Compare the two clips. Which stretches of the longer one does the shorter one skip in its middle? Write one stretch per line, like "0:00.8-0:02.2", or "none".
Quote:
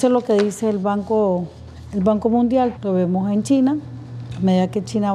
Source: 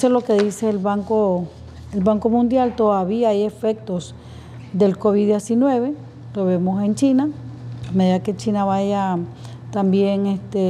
0:02.8-0:06.3